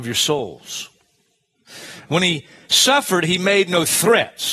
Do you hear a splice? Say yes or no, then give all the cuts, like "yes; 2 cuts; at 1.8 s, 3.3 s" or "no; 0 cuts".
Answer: yes; 1 cut; at 2.1 s